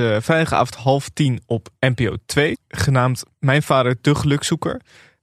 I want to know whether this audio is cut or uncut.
cut